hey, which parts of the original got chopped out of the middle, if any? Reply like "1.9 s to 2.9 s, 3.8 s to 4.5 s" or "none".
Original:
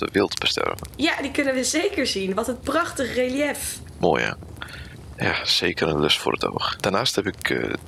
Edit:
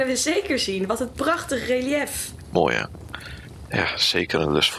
none